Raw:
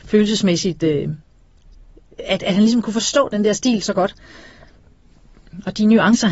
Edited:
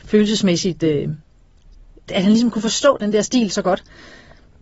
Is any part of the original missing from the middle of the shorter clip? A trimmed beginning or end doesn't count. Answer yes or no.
yes